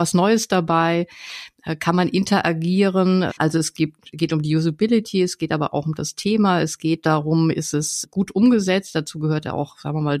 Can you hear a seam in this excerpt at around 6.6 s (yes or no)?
no